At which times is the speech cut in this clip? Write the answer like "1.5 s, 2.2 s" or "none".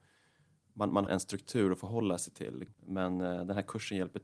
1.1 s, 2.7 s